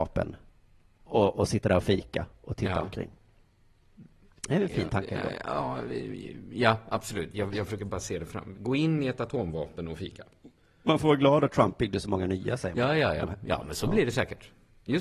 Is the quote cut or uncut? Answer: uncut